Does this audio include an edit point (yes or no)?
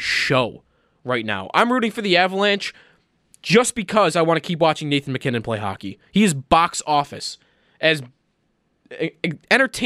no